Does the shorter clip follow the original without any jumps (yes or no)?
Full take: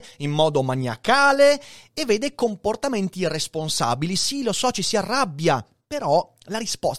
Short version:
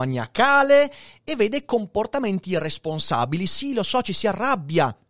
yes